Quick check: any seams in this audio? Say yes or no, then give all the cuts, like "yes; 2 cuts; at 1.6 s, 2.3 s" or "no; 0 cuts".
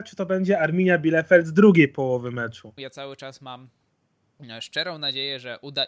yes; 1 cut; at 2.8 s